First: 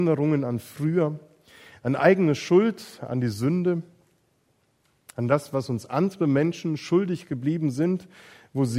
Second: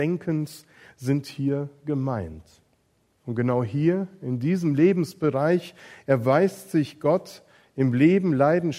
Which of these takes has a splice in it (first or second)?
second